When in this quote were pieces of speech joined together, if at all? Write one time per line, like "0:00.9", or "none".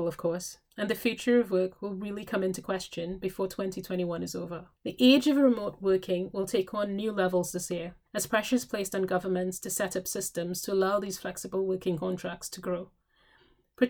0:04.8
0:08.1